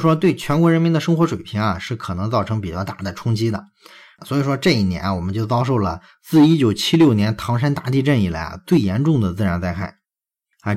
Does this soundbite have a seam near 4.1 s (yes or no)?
yes